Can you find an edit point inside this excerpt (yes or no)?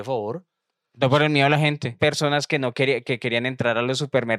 yes